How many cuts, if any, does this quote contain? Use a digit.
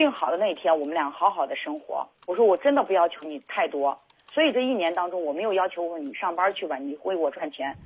1